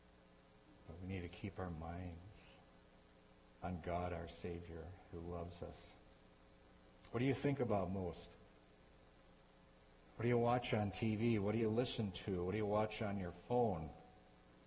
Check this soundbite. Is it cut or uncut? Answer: uncut